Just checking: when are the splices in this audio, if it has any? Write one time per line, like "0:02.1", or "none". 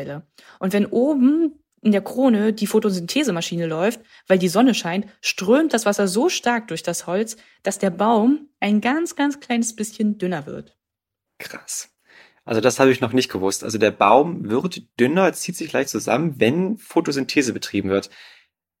none